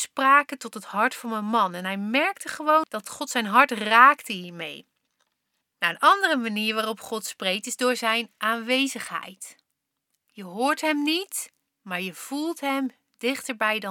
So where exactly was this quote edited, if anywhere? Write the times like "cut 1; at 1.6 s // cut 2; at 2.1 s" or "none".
cut 1; at 5.6 s